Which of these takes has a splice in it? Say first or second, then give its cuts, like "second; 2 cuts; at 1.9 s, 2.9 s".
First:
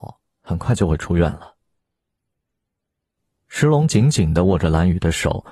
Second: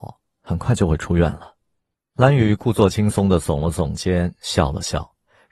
second; 1 cut; at 1.9 s